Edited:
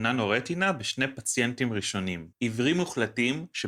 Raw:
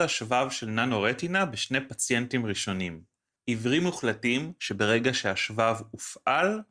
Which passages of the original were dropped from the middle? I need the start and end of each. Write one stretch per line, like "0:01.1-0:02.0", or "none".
0:03.1-0:03.4